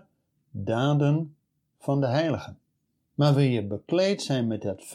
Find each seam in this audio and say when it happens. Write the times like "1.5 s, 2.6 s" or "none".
3.0 s